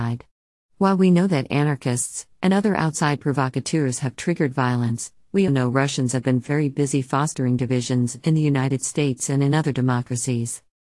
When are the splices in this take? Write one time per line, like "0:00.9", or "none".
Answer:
0:02.3
0:05.5